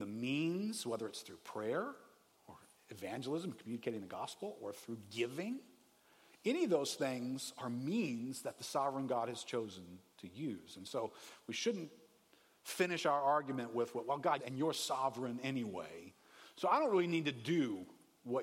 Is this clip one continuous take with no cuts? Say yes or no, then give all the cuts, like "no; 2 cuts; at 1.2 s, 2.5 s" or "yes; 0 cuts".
no; 1 cut; at 14.4 s